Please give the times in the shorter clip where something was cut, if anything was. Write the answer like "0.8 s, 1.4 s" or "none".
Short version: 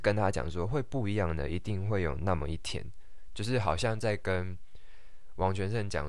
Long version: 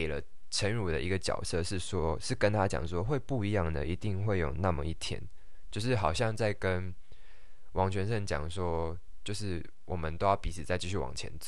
none